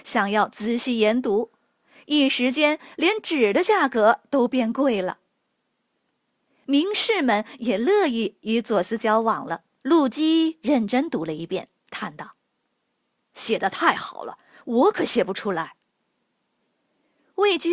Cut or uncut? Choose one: cut